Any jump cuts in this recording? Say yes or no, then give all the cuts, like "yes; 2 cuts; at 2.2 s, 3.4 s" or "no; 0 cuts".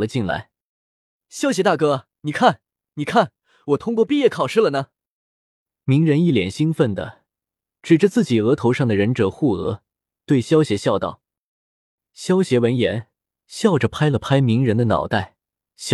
no; 0 cuts